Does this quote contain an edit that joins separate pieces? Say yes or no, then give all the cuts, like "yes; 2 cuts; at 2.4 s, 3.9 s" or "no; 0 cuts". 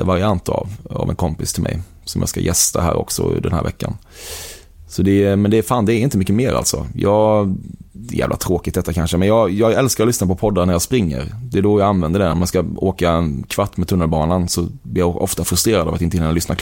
no; 0 cuts